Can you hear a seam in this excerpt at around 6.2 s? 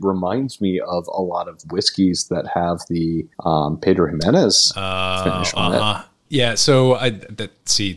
no; 1 cut; at 3.3 s

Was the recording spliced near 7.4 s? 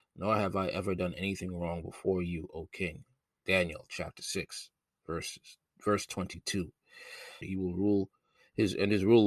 yes; 1 cut; at 7.4 s

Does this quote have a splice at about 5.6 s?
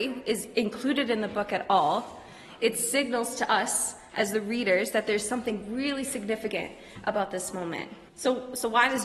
no; 1 cut; at 8.1 s

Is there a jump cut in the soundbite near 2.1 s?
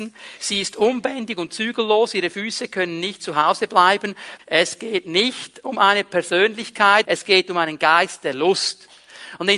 no; 2 cuts; at 4.4 s, 7.0 s

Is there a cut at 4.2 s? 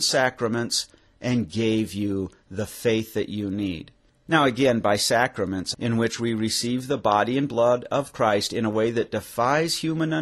no; 1 cut; at 5.7 s

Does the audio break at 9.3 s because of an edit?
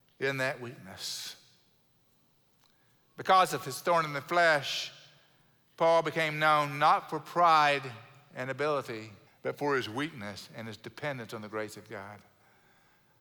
yes; 1 cut; at 9.3 s

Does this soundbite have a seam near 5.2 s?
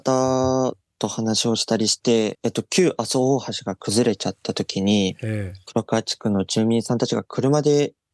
no; 1 cut; at 2.3 s

